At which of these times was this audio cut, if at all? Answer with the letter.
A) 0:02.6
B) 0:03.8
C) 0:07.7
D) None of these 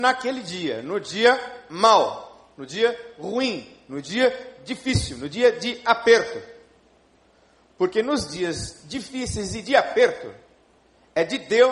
D